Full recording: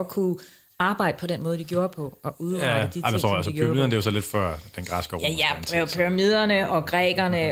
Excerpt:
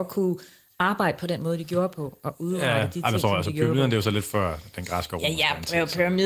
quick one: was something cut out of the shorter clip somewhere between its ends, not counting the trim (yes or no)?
no